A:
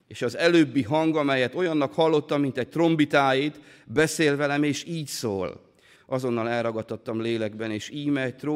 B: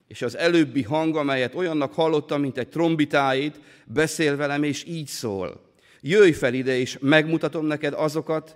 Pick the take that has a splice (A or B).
A